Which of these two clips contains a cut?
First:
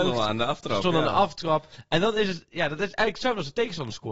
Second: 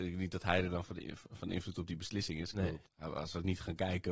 second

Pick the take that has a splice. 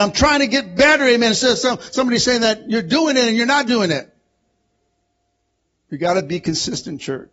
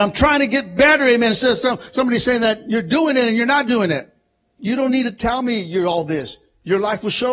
second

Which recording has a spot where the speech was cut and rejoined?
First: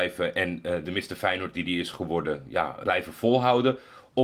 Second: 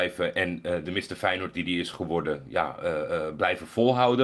first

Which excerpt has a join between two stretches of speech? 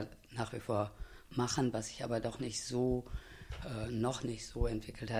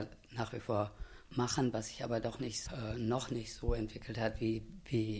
second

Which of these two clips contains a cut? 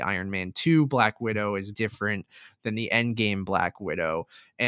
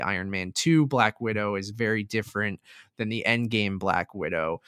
first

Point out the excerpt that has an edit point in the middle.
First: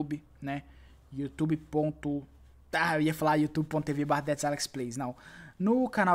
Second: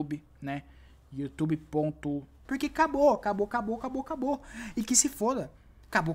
second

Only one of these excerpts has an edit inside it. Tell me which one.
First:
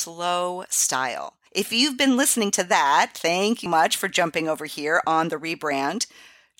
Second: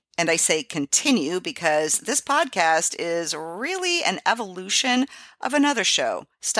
first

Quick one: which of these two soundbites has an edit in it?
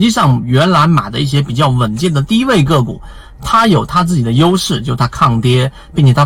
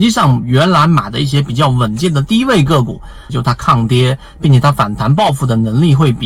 second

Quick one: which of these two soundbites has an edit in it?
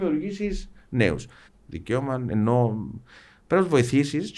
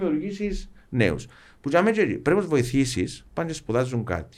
first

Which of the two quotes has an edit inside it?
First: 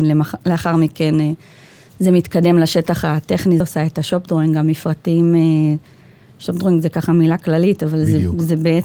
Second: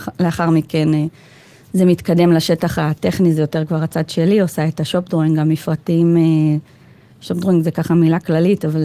first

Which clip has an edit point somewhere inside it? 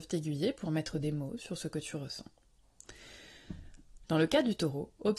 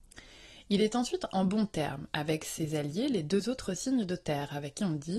first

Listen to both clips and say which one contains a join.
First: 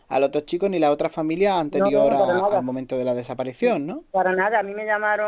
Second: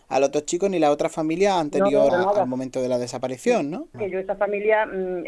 second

